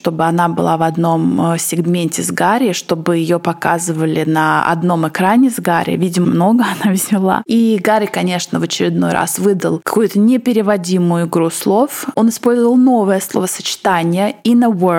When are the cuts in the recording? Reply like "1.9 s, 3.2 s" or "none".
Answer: 6.2 s